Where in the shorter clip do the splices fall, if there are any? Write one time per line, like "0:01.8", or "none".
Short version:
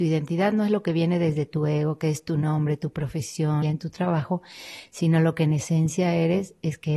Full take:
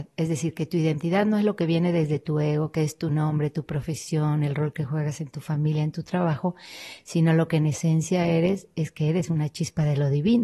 0:03.6